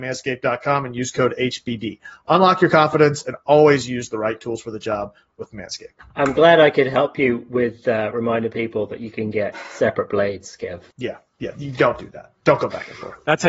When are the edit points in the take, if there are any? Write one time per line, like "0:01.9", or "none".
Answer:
0:06.1
0:10.9